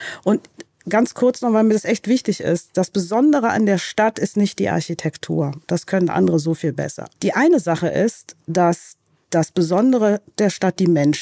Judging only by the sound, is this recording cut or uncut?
cut